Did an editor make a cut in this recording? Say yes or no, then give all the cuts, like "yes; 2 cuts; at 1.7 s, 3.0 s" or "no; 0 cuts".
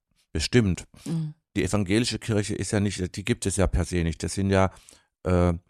no; 0 cuts